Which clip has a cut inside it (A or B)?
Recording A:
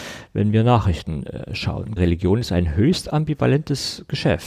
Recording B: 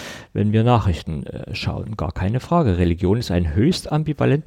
A